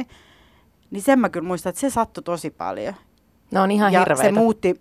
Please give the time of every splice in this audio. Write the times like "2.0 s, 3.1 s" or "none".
none